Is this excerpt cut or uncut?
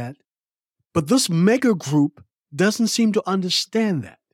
uncut